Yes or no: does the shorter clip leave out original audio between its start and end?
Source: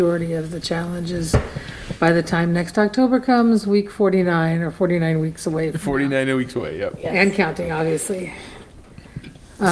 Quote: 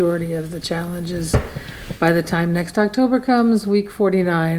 no